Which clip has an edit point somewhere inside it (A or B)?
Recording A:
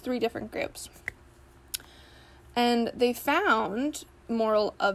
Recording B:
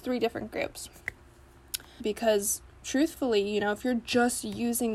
B